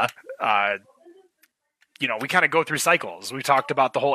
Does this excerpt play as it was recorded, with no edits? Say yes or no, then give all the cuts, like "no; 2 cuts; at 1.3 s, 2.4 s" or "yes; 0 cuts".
yes; 0 cuts